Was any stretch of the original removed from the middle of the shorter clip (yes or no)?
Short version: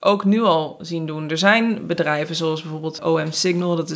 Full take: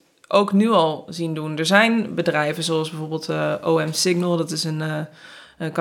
yes